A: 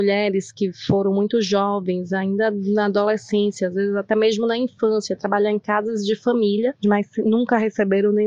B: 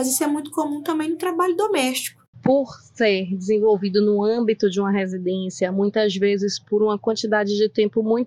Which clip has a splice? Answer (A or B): B